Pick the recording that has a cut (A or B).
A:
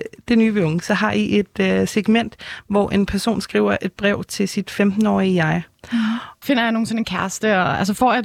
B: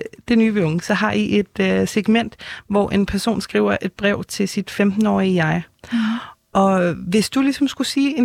A